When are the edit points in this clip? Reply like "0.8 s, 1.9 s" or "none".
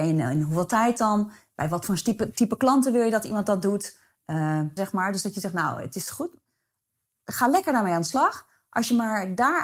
4.8 s